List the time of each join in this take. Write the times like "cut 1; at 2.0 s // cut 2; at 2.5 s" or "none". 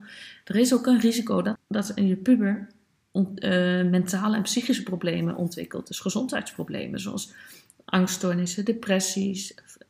cut 1; at 1.6 s

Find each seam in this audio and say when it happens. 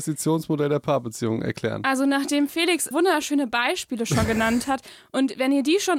cut 1; at 2.9 s

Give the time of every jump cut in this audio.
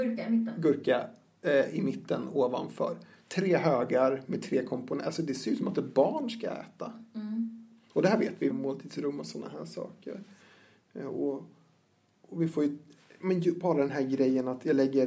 cut 1; at 8.5 s

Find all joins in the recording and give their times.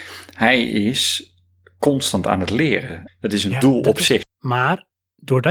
cut 1; at 3.1 s // cut 2; at 4.2 s

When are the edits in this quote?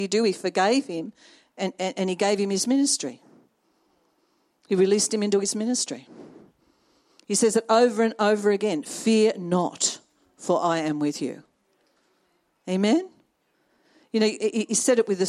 none

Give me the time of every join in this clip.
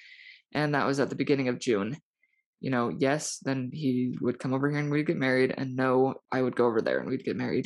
cut 1; at 2.5 s // cut 2; at 6.2 s

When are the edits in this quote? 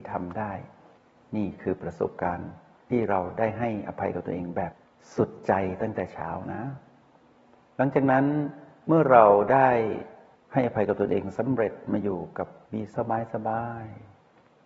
cut 1; at 12.9 s

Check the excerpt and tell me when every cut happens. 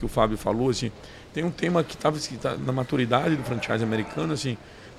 cut 1; at 2.6 s

